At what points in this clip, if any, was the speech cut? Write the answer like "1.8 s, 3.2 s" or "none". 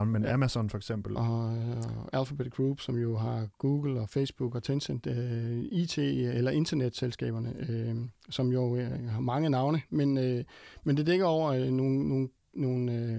1.2 s